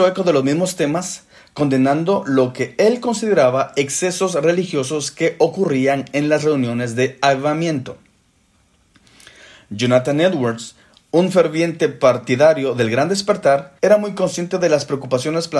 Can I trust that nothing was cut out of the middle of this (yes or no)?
no